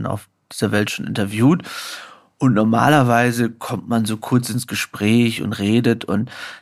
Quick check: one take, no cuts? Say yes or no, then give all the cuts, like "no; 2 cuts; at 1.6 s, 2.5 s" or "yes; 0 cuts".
yes; 0 cuts